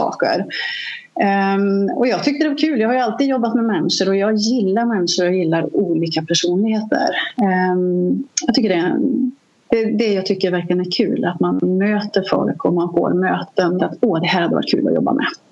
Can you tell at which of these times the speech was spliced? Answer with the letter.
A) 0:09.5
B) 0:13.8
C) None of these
B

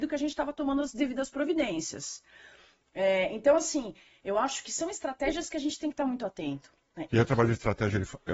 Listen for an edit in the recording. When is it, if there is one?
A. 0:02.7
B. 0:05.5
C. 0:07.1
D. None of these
C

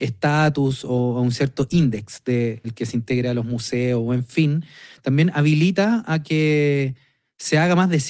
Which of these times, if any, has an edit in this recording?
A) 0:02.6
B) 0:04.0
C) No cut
A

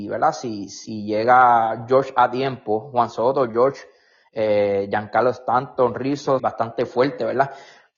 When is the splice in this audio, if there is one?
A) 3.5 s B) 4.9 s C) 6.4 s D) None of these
C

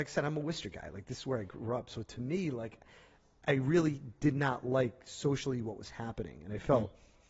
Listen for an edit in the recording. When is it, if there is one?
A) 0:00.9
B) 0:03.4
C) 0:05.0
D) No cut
D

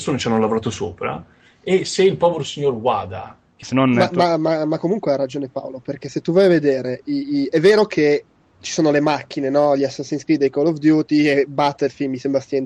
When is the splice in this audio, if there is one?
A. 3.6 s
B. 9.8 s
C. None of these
A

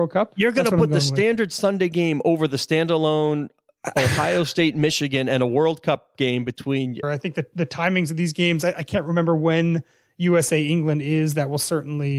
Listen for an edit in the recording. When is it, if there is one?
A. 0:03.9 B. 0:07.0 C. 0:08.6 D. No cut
B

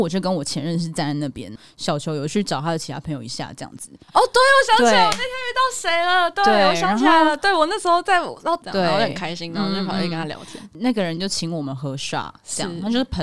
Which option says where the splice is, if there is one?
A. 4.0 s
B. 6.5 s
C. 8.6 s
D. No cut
C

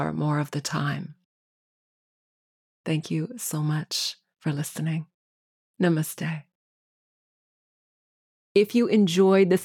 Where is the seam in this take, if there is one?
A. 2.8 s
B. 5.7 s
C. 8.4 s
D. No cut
A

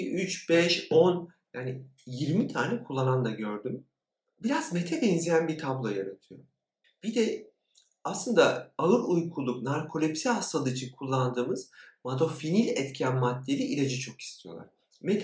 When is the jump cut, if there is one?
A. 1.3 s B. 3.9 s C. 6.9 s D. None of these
D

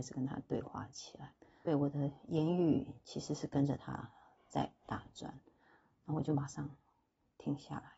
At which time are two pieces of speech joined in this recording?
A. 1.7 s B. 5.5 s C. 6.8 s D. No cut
A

